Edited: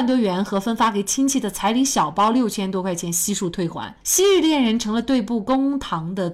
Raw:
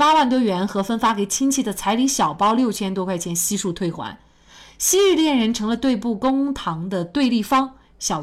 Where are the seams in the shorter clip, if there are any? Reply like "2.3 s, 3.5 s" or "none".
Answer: 4.0 s

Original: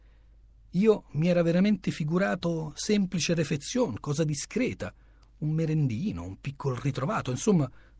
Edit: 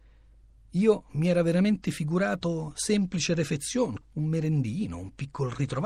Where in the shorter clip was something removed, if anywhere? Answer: 4.0 s

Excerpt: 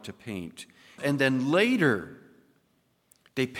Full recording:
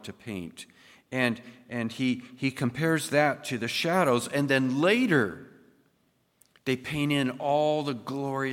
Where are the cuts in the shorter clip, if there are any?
1.0 s

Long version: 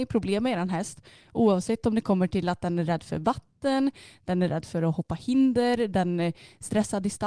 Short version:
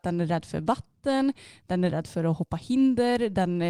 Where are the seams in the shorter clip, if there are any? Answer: none

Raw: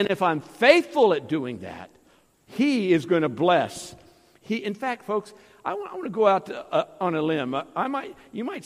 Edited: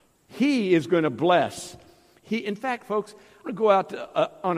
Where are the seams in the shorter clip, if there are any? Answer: 3.4 s

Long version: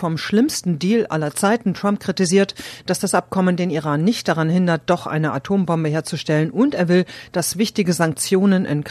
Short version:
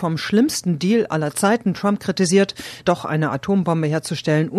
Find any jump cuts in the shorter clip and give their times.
2.8 s

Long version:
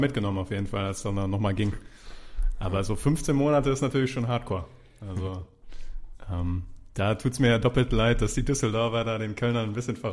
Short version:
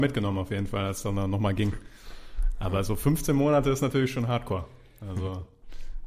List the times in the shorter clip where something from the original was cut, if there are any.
none

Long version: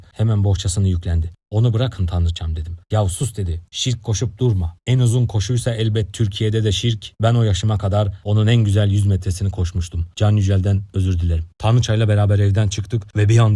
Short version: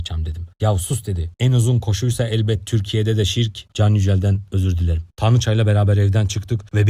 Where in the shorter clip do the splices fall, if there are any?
1.3 s, 3.7 s

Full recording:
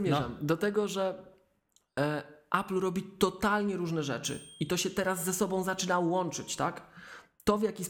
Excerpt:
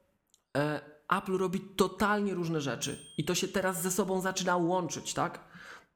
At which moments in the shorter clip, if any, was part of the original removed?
none

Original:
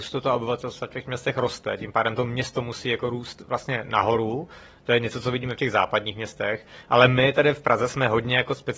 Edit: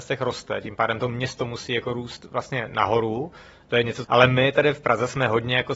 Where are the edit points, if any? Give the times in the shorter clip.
4.0 s

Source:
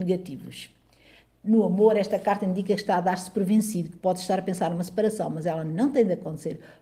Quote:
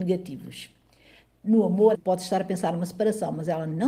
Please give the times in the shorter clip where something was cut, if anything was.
1.9 s

